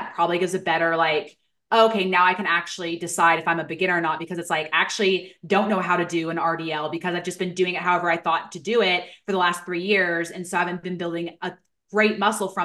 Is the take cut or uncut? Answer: uncut